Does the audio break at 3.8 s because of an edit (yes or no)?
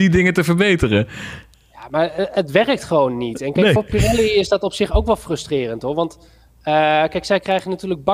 no